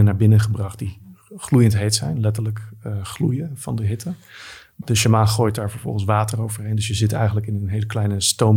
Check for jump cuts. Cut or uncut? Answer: uncut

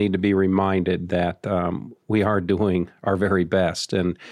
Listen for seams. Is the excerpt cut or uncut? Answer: uncut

